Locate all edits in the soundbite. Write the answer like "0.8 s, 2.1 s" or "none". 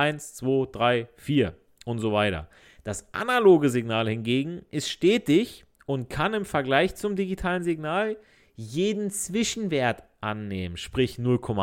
none